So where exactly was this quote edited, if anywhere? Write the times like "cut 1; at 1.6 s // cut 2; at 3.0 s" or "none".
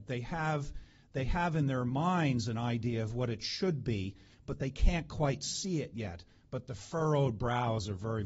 none